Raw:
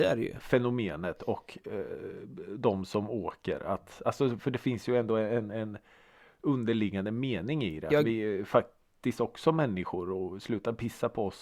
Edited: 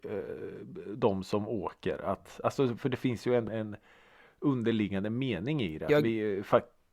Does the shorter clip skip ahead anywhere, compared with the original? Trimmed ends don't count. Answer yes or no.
yes